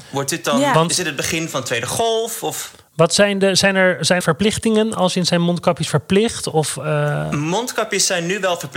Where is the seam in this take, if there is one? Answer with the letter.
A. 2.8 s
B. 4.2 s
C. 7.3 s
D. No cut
B